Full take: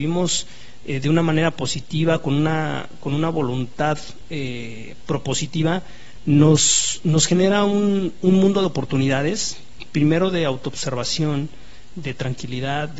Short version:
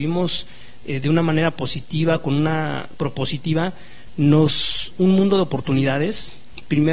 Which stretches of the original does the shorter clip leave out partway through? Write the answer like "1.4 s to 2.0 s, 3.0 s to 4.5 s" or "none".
2.9 s to 5.0 s, 7.0 s to 8.1 s